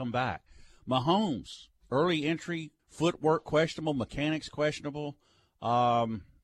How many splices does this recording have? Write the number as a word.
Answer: one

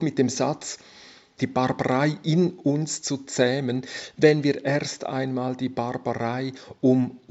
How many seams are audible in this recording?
one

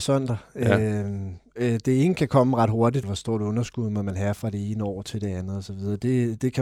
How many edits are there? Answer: one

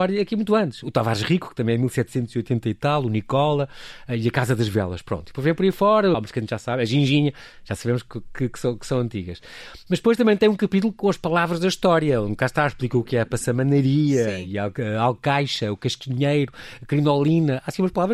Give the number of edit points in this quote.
one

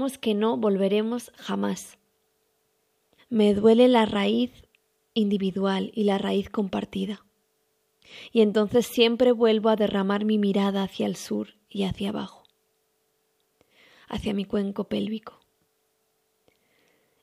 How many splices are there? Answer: one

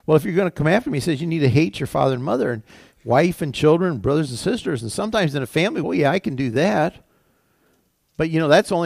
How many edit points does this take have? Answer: one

